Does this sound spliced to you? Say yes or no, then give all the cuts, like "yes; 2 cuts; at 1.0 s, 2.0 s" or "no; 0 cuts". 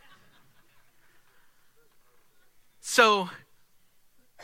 no; 0 cuts